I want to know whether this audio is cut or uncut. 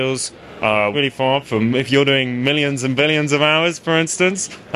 cut